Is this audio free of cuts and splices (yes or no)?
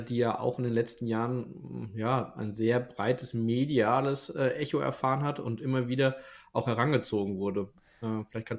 yes